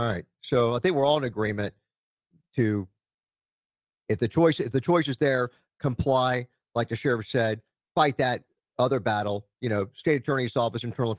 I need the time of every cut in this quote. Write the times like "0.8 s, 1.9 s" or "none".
none